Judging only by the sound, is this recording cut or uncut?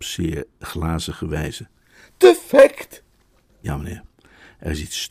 uncut